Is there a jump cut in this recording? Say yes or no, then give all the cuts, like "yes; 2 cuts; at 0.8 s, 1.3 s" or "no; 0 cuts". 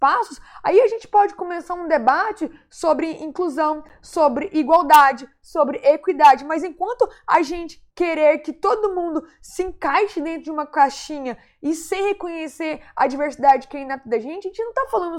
yes; 1 cut; at 7.9 s